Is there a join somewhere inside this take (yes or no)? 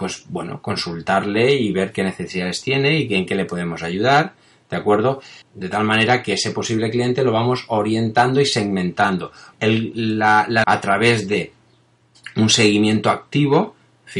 yes